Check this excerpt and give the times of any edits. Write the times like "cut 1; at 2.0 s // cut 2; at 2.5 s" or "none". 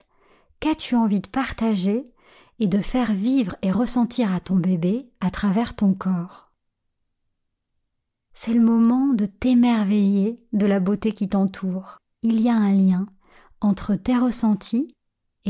cut 1; at 12.1 s